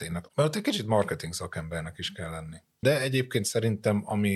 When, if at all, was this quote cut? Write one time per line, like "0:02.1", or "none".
0:02.8